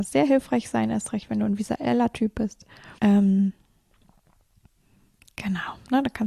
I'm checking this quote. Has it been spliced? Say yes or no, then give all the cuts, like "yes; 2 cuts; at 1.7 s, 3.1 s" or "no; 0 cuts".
yes; 1 cut; at 3.0 s